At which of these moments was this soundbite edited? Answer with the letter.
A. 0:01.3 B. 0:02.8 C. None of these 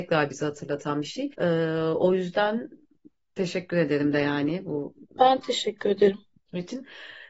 A